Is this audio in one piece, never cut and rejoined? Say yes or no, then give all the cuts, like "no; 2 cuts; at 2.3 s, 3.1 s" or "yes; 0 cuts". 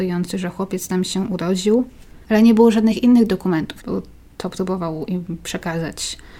no; 1 cut; at 3.8 s